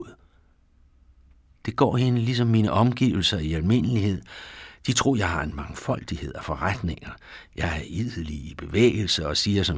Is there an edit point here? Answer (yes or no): no